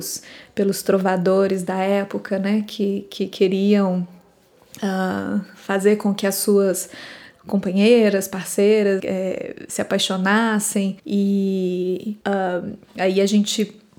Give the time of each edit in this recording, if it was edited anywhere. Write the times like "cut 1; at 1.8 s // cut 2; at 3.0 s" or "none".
cut 1; at 9.0 s // cut 2; at 11.0 s // cut 3; at 12.2 s